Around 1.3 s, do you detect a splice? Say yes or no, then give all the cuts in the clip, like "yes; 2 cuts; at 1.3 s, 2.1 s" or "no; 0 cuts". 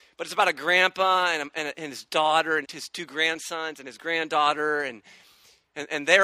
no; 1 cut; at 2.6 s